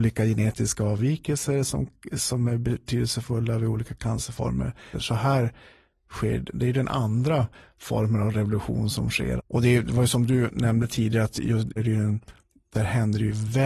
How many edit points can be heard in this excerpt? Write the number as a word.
three